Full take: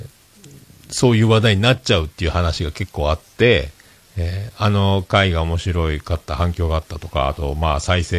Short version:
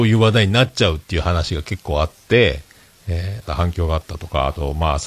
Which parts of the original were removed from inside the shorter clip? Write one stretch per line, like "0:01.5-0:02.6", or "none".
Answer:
0:04.6-0:06.3